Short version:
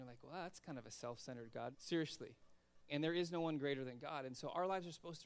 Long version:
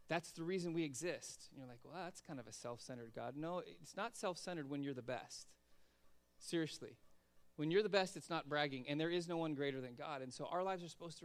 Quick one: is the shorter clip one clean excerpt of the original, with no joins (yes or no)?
no